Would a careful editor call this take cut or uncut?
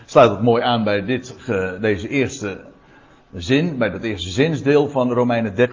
uncut